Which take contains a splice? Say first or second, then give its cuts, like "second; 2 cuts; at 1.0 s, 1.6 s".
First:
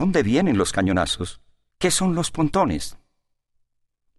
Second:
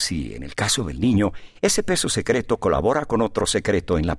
first; 1 cut; at 1.7 s